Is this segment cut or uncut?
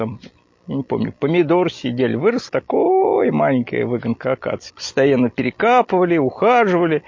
cut